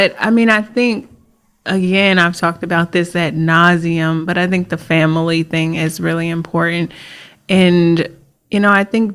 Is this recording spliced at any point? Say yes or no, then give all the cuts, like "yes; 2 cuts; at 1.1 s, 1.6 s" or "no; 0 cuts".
no; 0 cuts